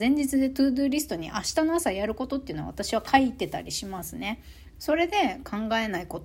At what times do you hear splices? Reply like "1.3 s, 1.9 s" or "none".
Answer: 4.7 s